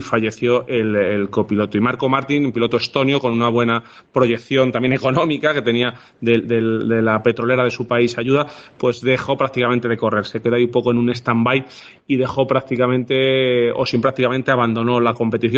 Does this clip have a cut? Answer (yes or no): yes